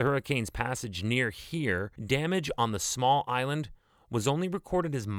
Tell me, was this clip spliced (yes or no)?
yes